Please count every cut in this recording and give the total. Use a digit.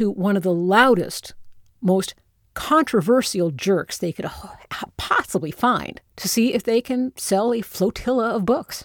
1